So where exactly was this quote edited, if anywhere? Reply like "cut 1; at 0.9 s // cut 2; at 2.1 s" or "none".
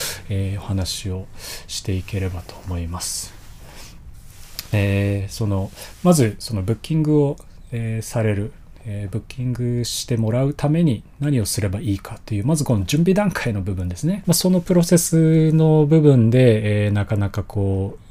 cut 1; at 14.2 s